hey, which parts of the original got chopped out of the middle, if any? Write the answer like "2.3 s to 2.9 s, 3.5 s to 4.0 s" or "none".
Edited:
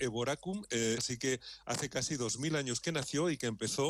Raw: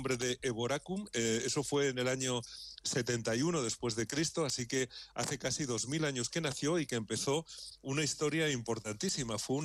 1.4 s to 4.5 s